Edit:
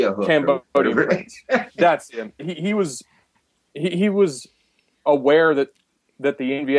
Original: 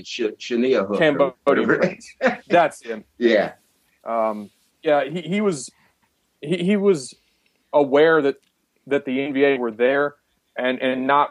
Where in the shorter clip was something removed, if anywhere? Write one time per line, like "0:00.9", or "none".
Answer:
0:02.4